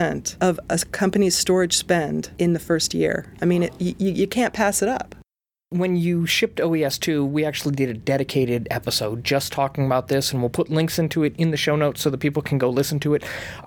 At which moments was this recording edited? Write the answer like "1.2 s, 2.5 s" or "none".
none